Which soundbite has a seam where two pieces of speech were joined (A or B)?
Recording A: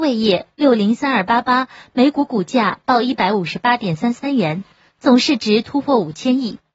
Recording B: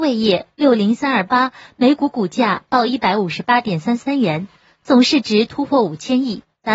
B